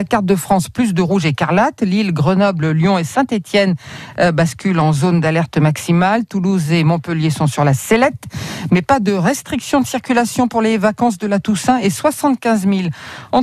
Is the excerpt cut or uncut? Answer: uncut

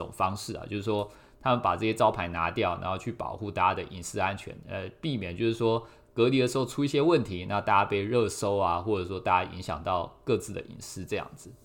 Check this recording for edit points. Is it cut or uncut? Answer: uncut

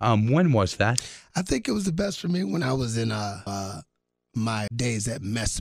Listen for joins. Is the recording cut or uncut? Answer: cut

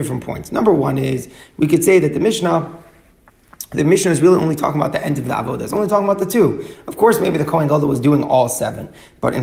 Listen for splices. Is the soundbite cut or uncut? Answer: uncut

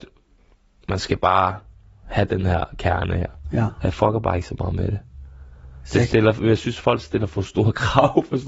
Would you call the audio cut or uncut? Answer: uncut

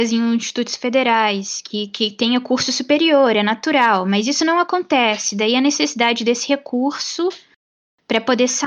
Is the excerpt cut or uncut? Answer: uncut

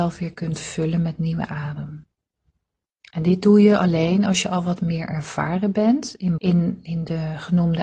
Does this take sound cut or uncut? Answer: cut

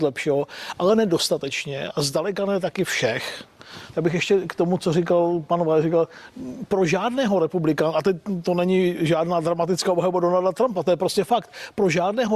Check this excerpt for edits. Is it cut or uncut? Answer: cut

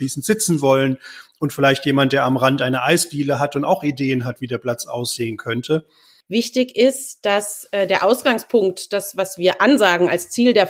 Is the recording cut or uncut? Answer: cut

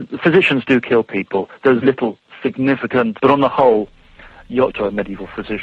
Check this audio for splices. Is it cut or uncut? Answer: cut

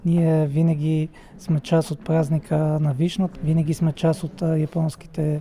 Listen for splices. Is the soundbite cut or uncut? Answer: cut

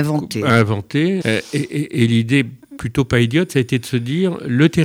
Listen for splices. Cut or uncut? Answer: cut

